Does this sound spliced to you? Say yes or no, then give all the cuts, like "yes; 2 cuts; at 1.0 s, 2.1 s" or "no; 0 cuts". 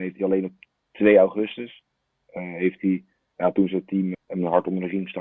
yes; 1 cut; at 4.1 s